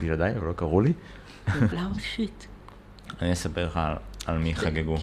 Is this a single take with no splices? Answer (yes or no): no